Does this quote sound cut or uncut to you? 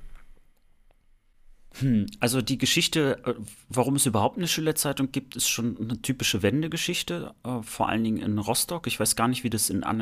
uncut